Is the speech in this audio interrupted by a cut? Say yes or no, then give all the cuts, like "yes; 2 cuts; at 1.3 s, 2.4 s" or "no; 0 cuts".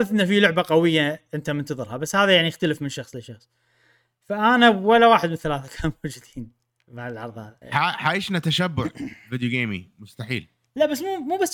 yes; 1 cut; at 7.6 s